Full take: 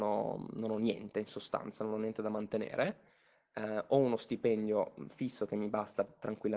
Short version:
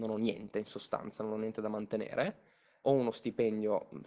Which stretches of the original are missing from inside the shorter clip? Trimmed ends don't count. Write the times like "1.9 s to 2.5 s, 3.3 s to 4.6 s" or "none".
3.4 s to 3.9 s